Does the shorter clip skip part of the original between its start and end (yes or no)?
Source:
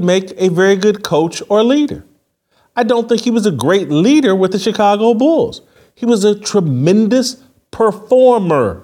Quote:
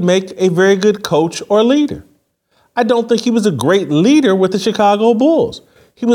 no